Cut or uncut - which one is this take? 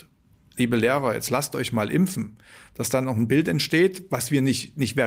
uncut